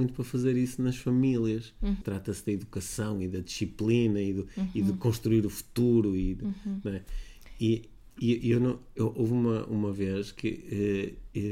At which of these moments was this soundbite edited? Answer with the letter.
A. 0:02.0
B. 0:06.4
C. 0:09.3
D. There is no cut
A